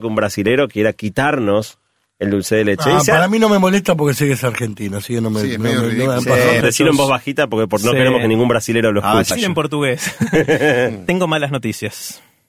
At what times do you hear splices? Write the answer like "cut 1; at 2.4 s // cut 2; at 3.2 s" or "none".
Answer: cut 1; at 6.6 s // cut 2; at 9.3 s